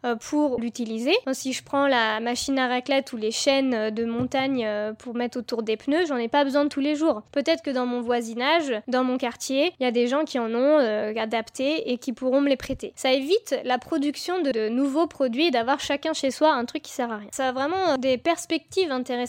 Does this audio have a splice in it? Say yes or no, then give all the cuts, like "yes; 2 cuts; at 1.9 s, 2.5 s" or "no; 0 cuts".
no; 0 cuts